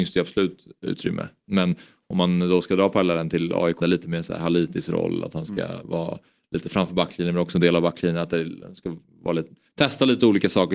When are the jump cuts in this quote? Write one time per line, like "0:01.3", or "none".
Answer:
0:03.8